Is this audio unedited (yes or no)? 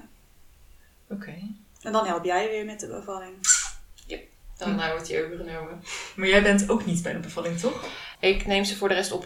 no